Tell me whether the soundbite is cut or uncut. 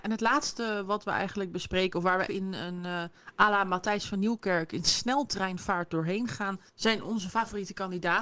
cut